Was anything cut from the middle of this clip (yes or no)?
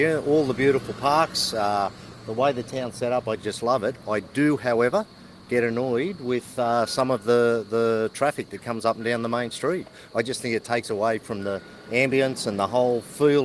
no